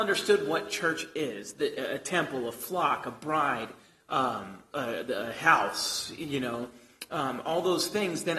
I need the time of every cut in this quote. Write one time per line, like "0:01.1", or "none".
none